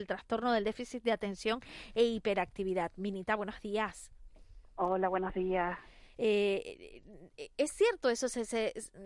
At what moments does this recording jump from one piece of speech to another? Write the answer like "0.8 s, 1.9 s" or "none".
none